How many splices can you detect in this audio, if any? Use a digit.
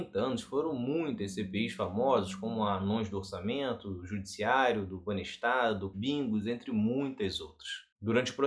1